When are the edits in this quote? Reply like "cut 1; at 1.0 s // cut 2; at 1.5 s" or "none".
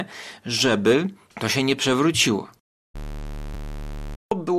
none